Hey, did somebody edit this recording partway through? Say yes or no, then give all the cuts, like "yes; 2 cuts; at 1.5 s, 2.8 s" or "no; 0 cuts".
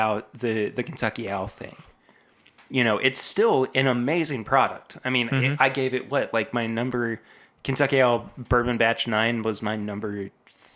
no; 0 cuts